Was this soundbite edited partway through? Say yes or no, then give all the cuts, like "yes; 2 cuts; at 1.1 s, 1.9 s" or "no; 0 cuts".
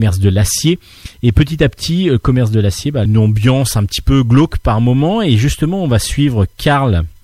yes; 1 cut; at 3.1 s